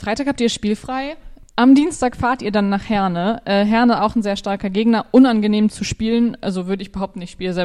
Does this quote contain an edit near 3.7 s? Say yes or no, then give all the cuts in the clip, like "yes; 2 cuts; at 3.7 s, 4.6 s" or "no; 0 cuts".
no; 1 cut; at 1.5 s